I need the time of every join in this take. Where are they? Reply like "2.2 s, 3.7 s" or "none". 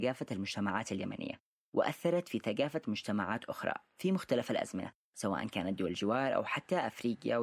none